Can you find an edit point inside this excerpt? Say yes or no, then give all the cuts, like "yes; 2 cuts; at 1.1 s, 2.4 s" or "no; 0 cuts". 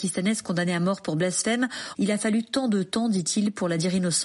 no; 0 cuts